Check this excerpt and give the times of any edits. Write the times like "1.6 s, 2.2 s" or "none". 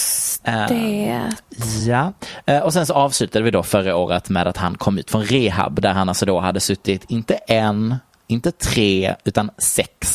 none